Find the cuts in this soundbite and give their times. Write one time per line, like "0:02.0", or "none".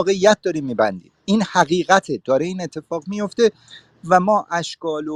0:01.2

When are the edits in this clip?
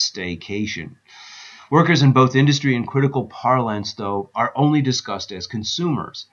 none

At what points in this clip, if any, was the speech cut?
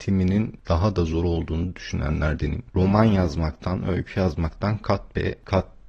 0:02.7

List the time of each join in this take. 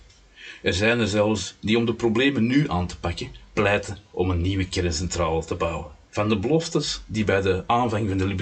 0:06.1

